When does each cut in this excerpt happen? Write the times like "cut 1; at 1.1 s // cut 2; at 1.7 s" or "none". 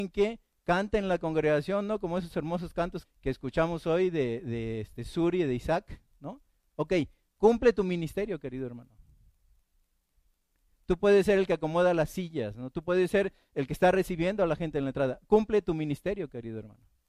cut 1; at 3.0 s